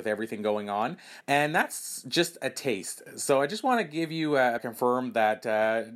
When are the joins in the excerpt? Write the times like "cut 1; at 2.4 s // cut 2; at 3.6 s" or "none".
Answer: cut 1; at 1.2 s // cut 2; at 4.6 s